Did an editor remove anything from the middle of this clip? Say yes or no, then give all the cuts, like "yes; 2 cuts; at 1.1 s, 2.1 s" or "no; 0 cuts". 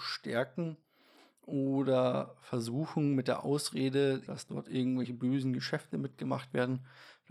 yes; 1 cut; at 4.3 s